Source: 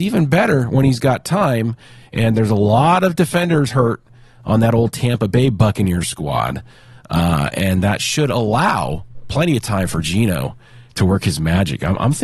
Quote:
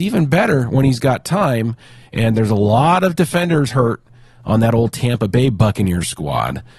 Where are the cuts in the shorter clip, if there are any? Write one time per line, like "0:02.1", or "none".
none

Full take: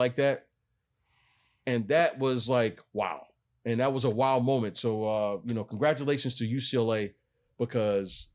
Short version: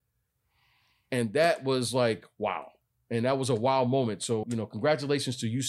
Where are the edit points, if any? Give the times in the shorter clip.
0:04.4

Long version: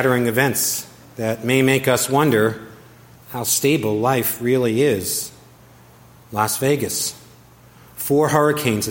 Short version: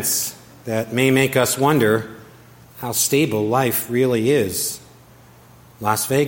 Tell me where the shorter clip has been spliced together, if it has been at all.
none

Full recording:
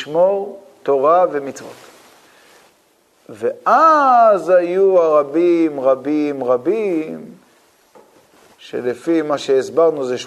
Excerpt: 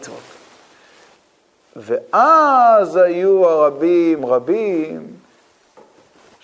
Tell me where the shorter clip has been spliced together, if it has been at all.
0:04.2

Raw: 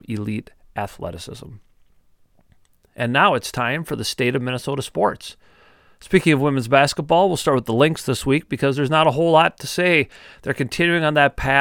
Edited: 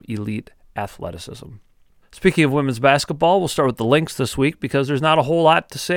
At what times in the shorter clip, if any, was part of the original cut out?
0:02.0

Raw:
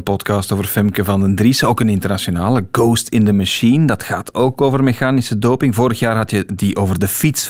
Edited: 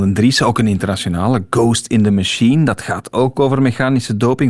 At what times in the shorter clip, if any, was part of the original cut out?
none

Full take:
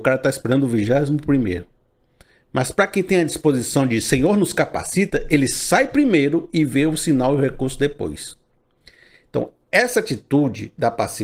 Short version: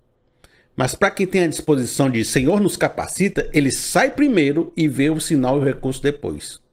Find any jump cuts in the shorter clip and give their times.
none

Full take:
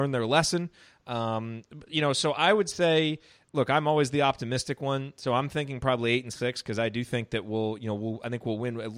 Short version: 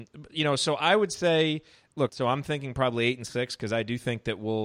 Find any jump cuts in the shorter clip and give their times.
0:02.1

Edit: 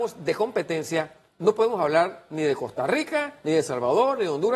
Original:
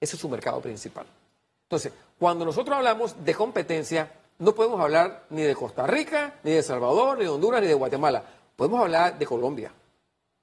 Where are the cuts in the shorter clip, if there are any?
none

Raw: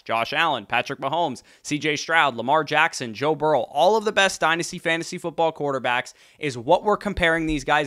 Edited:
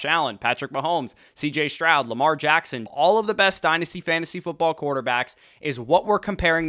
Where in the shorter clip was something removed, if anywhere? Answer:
0:02.9

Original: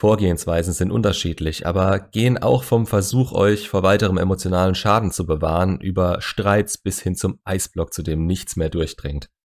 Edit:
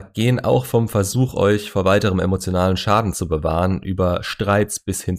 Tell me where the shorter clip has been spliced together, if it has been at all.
none

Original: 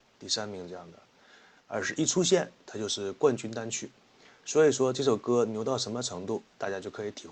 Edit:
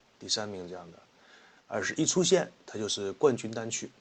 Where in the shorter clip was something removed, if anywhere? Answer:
none

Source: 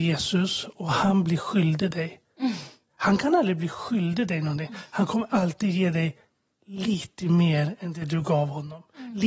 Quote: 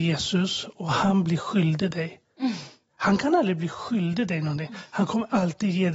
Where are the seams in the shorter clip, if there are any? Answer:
none

